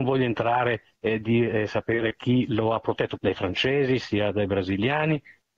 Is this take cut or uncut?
cut